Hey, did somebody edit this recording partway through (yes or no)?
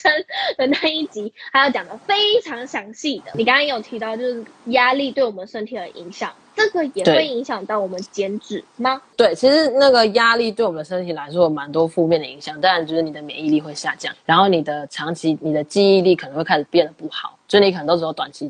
yes